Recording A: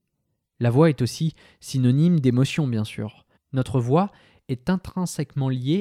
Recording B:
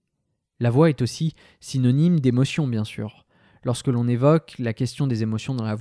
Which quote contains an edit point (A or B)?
A